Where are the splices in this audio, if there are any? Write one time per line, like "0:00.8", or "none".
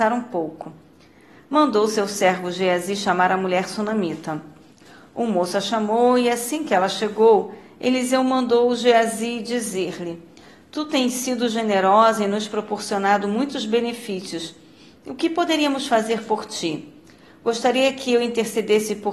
none